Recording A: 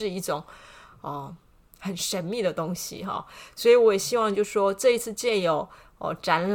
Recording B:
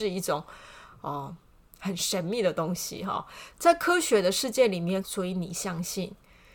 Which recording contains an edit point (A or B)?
B